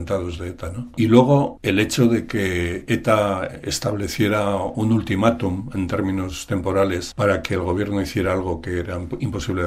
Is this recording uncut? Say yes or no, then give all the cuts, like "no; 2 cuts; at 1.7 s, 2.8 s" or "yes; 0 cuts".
yes; 0 cuts